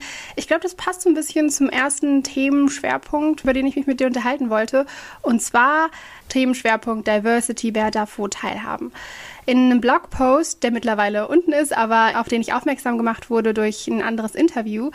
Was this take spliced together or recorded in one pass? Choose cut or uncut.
cut